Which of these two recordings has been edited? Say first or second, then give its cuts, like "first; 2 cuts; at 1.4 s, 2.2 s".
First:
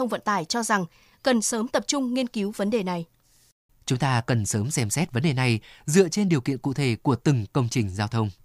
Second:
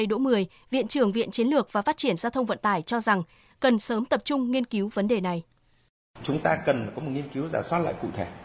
first; 1 cut; at 3.7 s